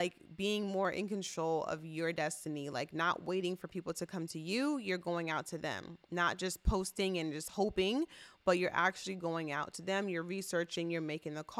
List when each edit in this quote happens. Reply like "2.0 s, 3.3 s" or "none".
none

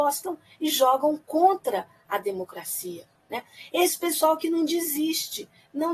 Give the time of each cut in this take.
none

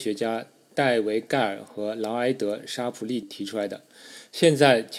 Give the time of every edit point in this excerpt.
3.2 s

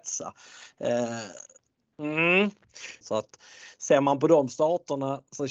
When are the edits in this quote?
1.9 s, 3.0 s

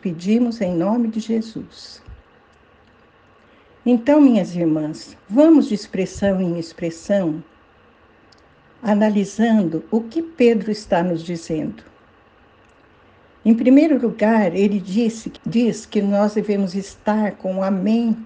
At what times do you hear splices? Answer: 5.2 s, 15.4 s

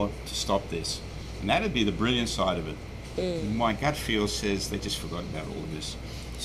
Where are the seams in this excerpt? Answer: none

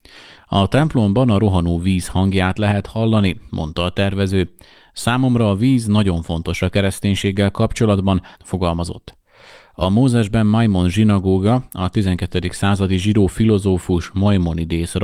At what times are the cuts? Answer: 8.3 s

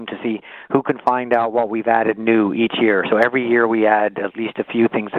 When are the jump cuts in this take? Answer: none

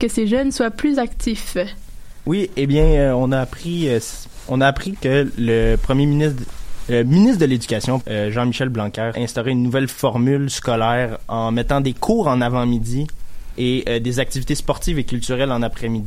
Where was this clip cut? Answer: 8.0 s, 9.1 s

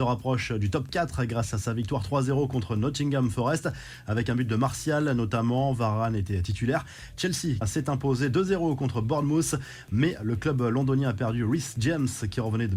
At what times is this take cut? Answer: 7.6 s

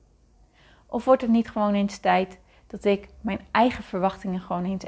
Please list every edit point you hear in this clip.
none

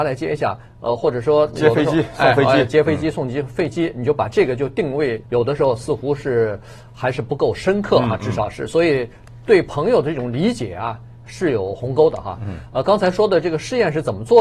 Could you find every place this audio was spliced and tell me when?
5.2 s

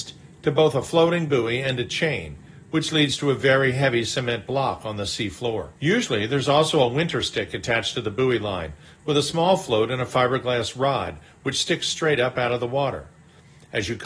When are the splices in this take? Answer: 5.8 s

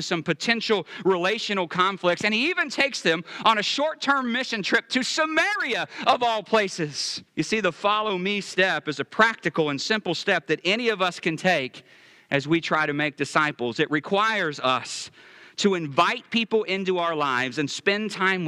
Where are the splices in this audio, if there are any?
7.3 s

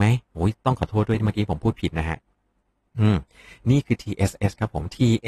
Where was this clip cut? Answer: none

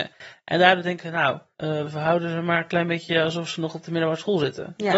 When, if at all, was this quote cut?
1.8 s

